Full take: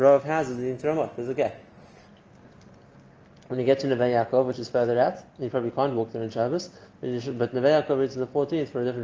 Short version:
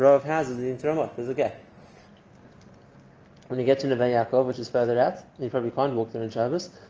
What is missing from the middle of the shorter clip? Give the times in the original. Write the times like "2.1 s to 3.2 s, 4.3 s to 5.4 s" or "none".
none